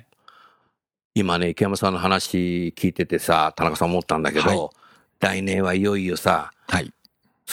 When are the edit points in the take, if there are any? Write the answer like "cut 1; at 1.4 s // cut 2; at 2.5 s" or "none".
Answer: none